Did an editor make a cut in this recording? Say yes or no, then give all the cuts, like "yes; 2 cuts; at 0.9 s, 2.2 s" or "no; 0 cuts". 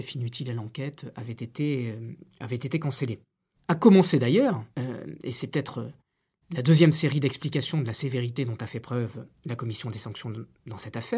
yes; 2 cuts; at 3.5 s, 4.7 s